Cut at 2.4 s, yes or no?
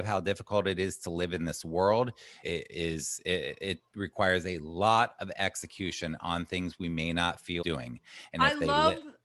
yes